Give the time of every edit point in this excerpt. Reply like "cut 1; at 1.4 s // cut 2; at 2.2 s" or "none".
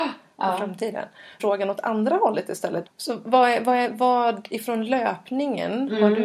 cut 1; at 1.4 s // cut 2; at 2.9 s